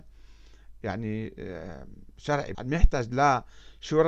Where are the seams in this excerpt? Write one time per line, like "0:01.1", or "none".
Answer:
0:02.5